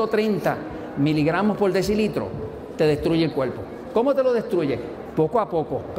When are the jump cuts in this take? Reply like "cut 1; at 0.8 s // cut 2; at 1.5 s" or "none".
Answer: none